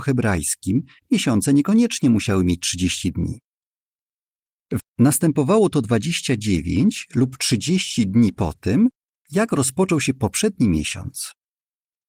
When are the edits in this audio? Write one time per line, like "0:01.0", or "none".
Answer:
0:04.8

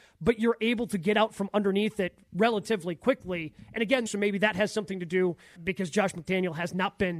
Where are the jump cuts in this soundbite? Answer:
0:04.1
0:05.5

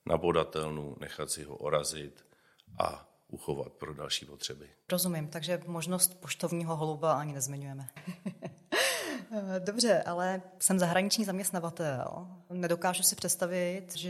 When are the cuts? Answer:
0:08.0

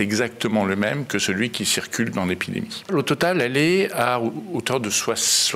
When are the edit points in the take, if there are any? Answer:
0:02.9

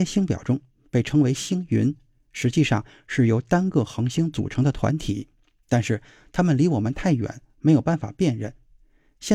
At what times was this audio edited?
none

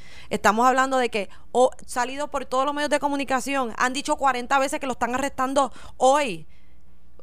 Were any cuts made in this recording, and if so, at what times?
0:01.8

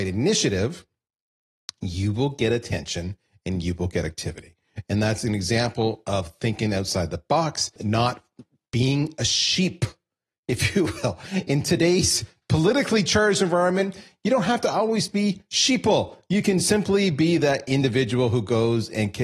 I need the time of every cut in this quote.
none

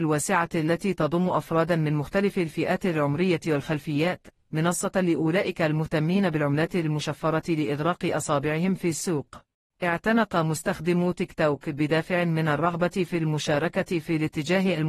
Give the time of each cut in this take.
0:09.6

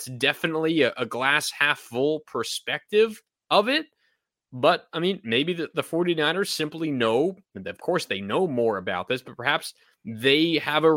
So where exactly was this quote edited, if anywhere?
none

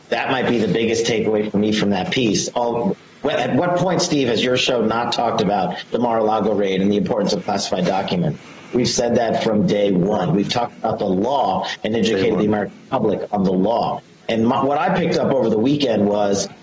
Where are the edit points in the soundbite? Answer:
none

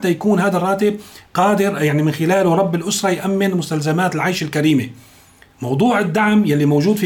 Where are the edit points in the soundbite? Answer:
0:01.3

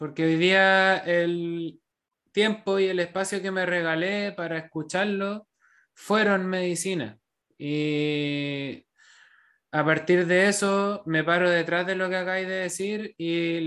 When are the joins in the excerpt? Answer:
none

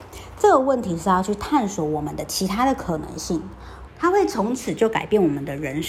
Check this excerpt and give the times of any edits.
0:03.9

